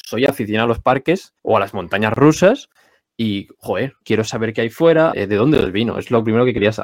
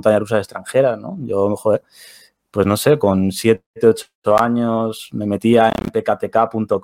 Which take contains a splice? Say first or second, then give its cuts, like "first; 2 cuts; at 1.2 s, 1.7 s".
first; 3 cuts; at 1.4 s, 4.0 s, 5.1 s